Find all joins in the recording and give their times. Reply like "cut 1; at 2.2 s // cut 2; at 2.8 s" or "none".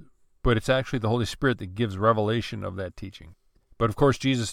cut 1; at 3.6 s